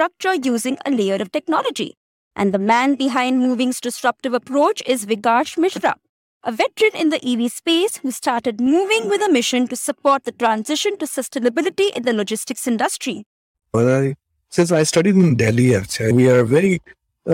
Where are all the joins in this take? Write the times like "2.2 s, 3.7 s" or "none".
13.5 s